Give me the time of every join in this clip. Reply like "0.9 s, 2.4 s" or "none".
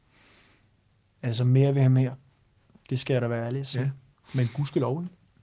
4.1 s

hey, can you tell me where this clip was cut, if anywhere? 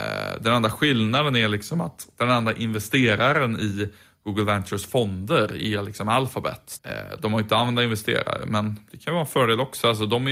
6.8 s

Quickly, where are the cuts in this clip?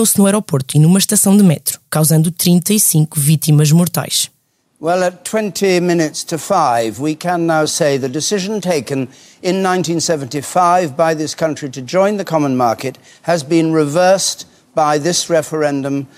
none

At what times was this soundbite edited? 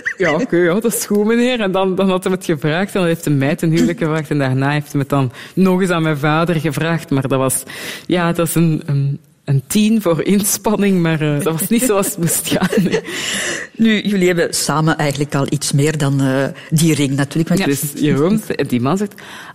11.4 s, 17.6 s

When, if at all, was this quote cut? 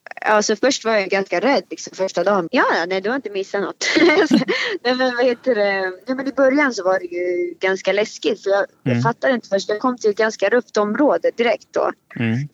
2.5 s

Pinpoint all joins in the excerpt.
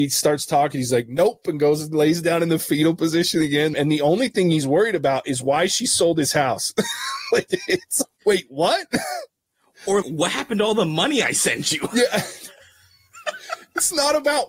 3.7 s, 8.0 s, 10.0 s

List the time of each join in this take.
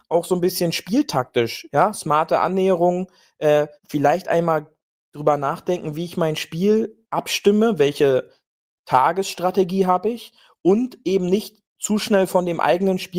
3.8 s

